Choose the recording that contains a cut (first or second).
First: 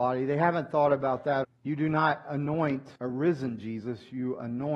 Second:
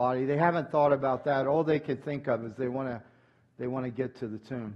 first